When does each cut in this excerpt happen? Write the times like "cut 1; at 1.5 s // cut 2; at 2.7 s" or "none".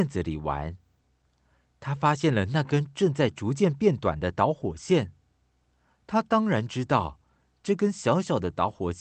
none